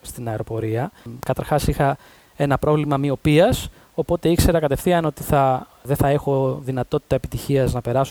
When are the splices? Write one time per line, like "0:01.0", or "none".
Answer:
none